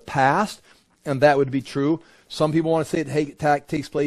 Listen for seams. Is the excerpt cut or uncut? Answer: uncut